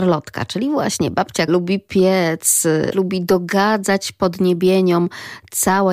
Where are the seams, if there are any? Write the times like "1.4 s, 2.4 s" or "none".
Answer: 1.5 s, 2.9 s